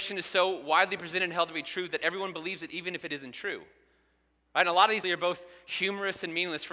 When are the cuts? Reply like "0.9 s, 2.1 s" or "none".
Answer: 5.0 s